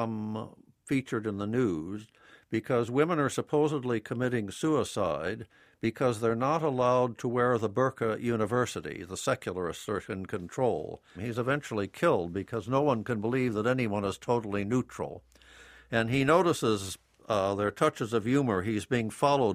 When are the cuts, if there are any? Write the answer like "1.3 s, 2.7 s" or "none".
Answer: 11.1 s